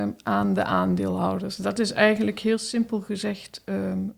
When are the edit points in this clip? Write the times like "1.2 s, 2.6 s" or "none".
none